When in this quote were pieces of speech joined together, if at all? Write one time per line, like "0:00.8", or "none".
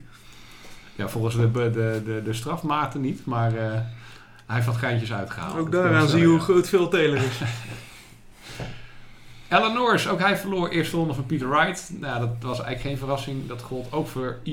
none